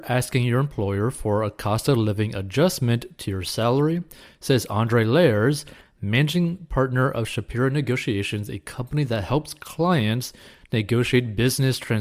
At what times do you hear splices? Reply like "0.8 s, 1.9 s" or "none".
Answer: none